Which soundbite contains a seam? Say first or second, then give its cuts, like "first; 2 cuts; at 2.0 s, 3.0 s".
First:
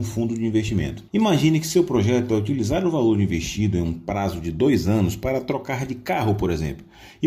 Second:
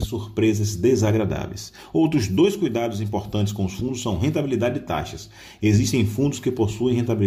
first; 1 cut; at 1.1 s